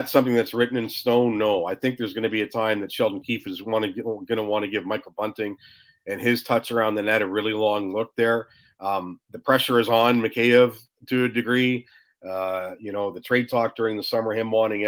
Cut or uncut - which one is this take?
uncut